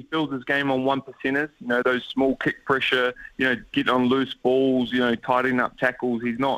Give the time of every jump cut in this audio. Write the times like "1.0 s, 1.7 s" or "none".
1.8 s